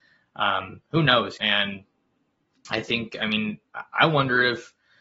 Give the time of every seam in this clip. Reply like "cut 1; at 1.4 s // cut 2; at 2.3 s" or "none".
cut 1; at 1.4 s